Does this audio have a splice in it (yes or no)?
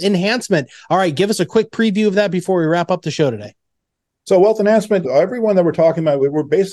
yes